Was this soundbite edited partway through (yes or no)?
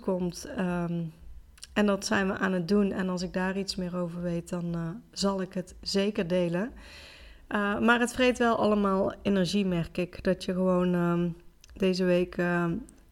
no